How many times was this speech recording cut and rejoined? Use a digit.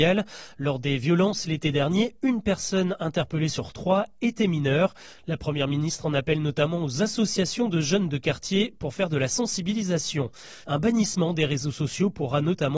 1